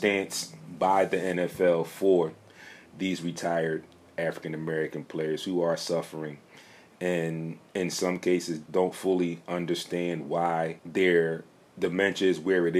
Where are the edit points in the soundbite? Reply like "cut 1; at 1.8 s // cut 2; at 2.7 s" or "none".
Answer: cut 1; at 8.7 s // cut 2; at 10.8 s